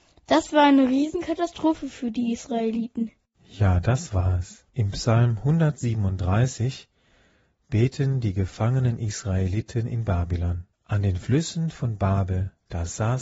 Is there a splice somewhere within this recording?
yes; 2 cuts; at 4.7 s, 10.7 s

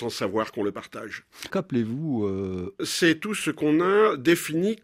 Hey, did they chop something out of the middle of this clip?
yes; 2 cuts; at 1.5 s, 2.8 s

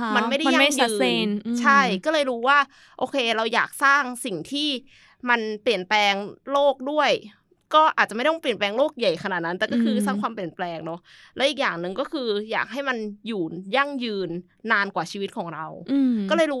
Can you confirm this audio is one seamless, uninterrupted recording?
yes; 0 cuts

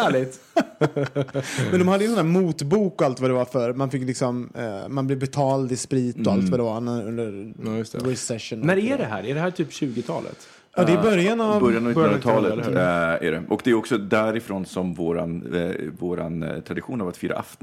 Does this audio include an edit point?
no; 0 cuts

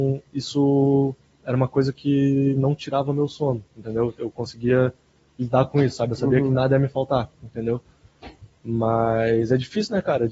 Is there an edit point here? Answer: no; 0 cuts

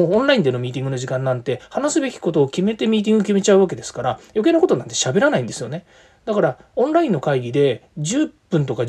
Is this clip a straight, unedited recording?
yes; 0 cuts

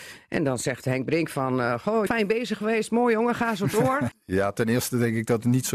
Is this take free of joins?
no; 2 cuts; at 2.1 s, 4.1 s

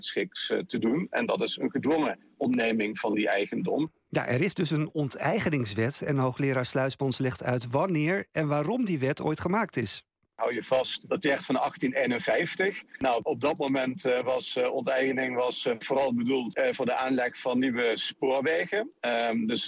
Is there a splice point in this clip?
yes; 1 cut; at 11.1 s

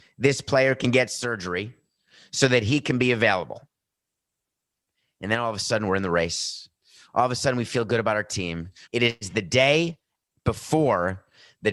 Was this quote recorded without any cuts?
no; 1 cut; at 8.8 s

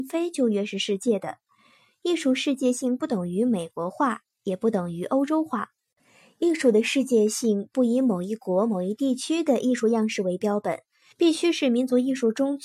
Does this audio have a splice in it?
yes; 1 cut; at 11.1 s

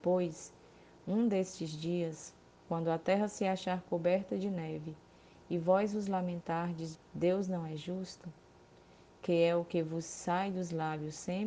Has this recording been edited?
yes; 1 cut; at 6.9 s

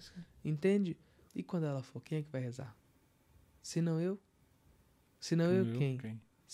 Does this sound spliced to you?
yes; 1 cut; at 1.3 s

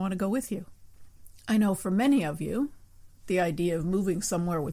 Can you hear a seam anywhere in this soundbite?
no; 0 cuts

